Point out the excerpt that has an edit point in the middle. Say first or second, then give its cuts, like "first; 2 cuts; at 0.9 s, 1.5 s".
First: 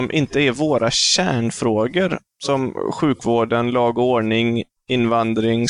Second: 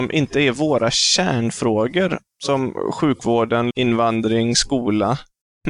second; 1 cut; at 3.7 s